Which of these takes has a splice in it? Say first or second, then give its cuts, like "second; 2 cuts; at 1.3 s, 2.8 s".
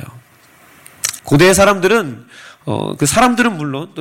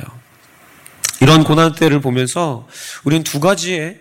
first; 1 cut; at 1.2 s